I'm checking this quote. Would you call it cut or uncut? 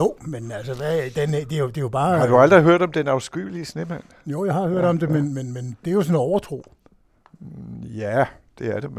uncut